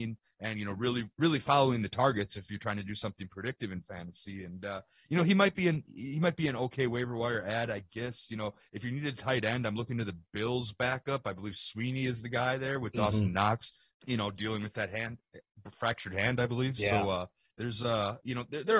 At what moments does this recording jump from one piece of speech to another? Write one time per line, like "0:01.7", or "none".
0:13.9